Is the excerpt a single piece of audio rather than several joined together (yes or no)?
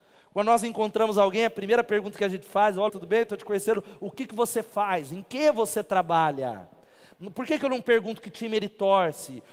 no